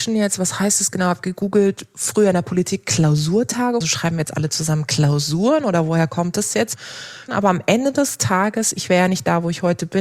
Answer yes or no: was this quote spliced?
yes